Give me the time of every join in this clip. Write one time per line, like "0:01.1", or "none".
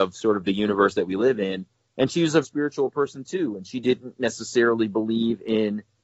0:02.4